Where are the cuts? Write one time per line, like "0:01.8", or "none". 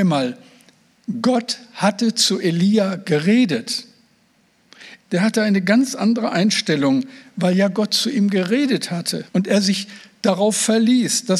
0:05.0
0:09.3